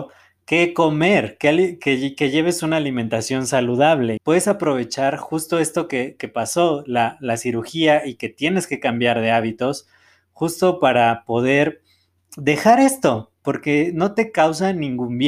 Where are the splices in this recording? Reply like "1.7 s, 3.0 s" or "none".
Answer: 4.2 s